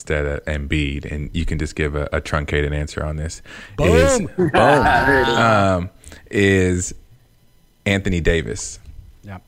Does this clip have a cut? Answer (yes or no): no